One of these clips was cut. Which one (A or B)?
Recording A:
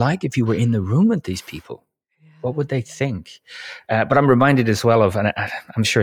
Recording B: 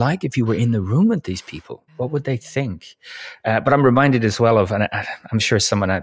B